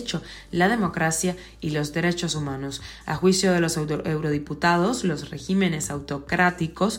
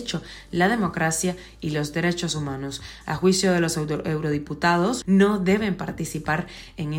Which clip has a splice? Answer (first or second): second